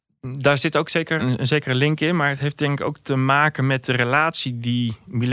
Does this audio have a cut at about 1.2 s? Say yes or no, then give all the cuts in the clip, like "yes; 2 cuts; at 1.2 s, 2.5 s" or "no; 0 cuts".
yes; 1 cut; at 1.2 s